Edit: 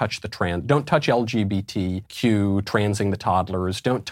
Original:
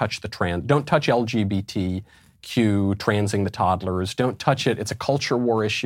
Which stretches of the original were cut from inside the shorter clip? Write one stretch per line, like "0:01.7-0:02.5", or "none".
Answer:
0:02.1-0:02.4